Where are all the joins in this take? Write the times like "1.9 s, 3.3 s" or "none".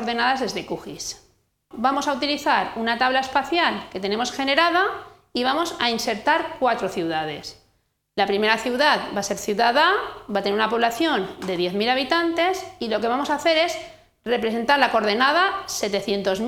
1.7 s